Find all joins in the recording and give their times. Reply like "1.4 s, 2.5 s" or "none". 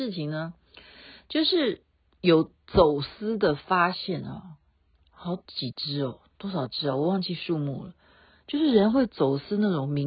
none